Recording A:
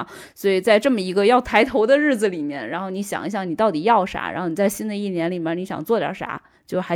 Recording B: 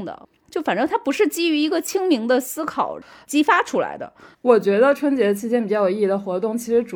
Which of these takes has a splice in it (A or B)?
B